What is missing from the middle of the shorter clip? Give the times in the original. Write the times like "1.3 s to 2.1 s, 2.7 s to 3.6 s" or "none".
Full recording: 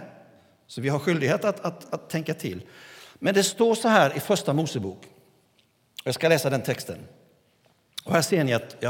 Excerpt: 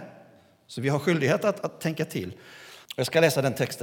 1.6 s to 1.9 s, 3.1 s to 5.9 s